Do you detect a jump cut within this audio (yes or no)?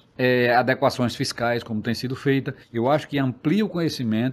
yes